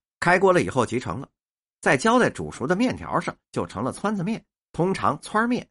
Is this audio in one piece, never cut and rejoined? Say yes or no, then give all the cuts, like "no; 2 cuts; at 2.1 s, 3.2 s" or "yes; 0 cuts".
yes; 0 cuts